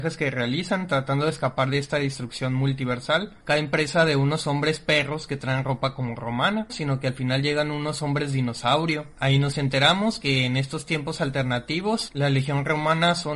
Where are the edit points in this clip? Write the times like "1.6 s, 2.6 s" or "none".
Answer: 6.7 s